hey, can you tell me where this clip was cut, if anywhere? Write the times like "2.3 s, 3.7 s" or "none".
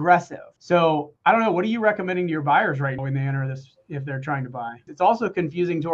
3.0 s, 4.9 s